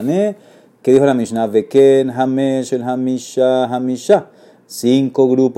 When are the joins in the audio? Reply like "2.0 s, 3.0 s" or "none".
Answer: 2.7 s